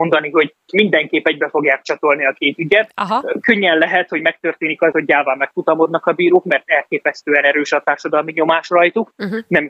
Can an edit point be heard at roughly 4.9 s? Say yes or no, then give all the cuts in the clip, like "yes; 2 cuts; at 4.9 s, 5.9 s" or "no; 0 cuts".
yes; 1 cut; at 4.9 s